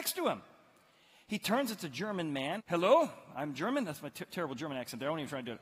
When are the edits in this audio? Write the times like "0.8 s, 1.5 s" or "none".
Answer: 2.6 s